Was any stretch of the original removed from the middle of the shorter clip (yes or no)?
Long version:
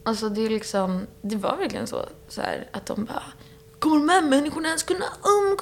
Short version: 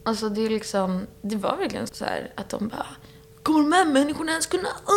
yes